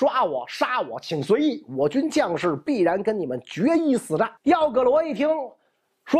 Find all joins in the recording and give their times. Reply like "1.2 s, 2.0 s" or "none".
4.4 s